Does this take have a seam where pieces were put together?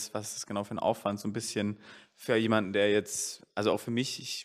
no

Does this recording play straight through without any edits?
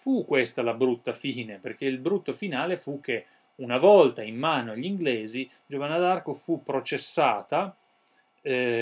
yes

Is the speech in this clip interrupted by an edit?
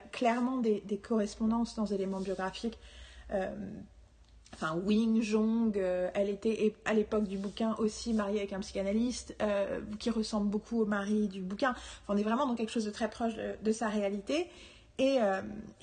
no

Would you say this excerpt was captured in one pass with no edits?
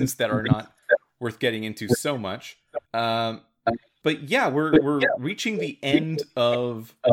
no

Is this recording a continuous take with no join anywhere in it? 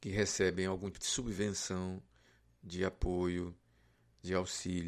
no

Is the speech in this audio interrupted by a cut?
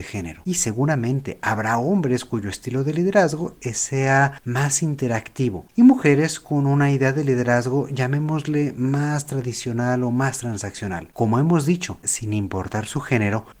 yes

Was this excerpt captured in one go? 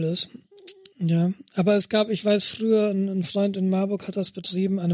no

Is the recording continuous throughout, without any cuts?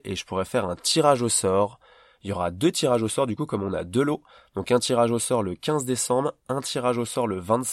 yes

